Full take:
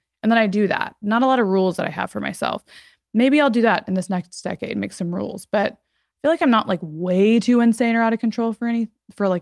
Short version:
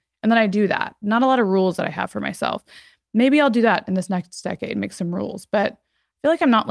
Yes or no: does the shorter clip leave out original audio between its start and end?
no